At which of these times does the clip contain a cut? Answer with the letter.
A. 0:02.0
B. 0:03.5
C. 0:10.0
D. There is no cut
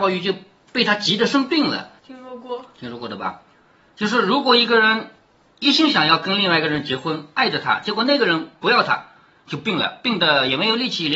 A